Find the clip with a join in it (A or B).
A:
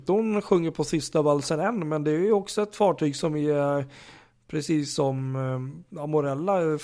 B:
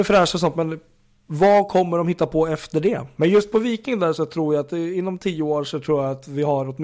B